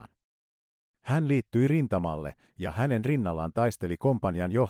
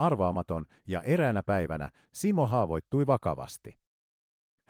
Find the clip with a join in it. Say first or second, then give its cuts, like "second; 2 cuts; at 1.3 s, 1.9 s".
second; 1 cut; at 2.1 s